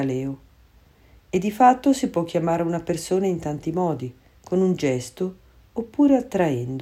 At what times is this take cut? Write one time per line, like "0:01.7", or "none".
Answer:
0:04.3